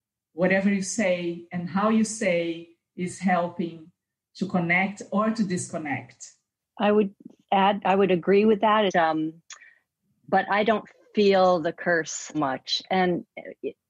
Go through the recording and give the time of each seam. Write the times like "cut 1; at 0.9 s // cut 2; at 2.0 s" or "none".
cut 1; at 6.6 s // cut 2; at 8.9 s // cut 3; at 12.3 s